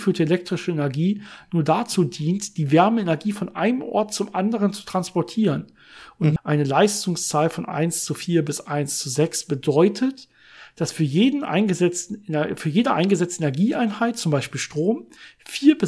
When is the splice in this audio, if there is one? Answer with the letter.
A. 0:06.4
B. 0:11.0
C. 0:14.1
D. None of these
A